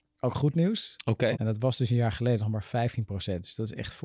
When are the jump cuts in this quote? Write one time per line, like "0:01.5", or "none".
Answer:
0:01.3